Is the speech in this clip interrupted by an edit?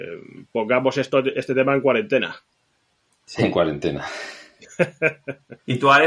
no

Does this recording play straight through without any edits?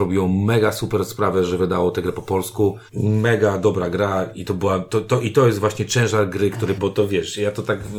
no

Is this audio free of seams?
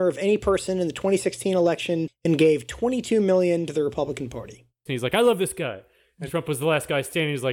no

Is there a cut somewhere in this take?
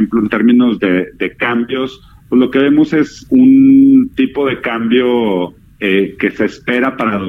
no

